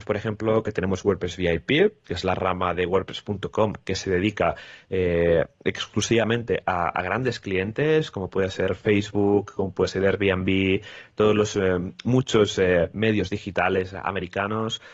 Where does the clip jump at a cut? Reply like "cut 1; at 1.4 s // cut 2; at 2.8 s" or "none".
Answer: none